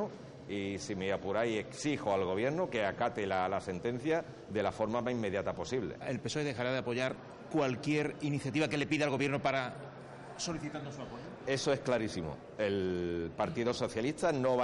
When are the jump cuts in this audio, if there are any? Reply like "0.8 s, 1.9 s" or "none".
none